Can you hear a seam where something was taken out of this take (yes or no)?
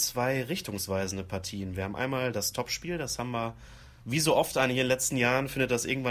yes